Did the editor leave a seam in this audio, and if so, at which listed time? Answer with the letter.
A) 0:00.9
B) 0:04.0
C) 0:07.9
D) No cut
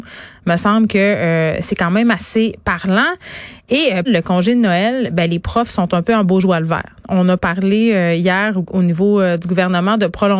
B